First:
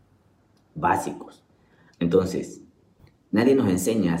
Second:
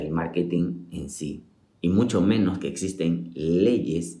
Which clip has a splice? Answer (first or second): first